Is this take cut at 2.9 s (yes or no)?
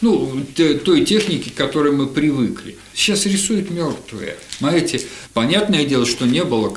yes